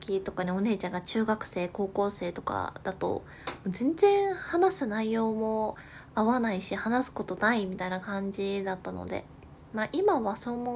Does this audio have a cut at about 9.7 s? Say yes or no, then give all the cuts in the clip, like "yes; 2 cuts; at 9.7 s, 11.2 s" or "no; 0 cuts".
no; 0 cuts